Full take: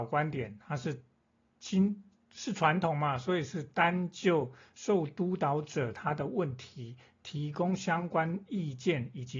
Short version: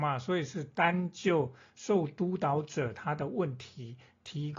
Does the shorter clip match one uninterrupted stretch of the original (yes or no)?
yes